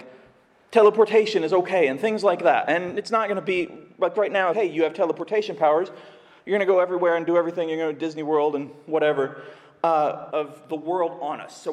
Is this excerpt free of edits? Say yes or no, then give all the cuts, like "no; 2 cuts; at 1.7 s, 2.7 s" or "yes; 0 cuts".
no; 2 cuts; at 4.5 s, 10.3 s